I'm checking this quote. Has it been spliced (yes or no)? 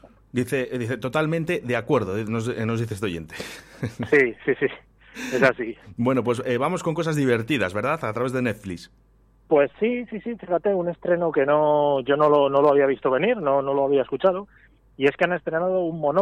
no